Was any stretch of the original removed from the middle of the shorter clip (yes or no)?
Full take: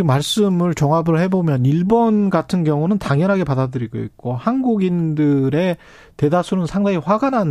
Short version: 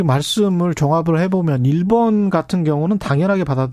no